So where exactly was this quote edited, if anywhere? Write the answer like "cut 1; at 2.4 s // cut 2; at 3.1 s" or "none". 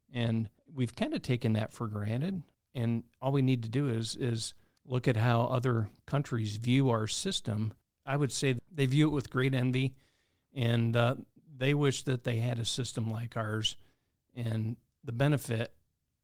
none